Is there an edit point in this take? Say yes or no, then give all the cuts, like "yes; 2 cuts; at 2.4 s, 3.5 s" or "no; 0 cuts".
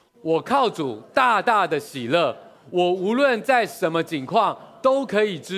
no; 0 cuts